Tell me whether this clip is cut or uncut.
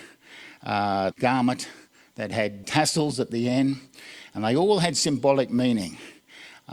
cut